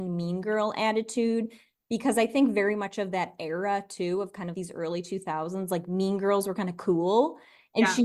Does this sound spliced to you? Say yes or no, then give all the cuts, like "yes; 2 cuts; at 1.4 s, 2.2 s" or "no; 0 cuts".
yes; 1 cut; at 4.5 s